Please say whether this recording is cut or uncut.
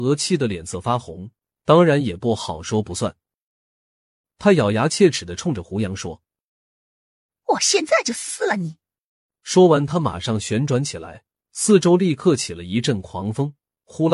uncut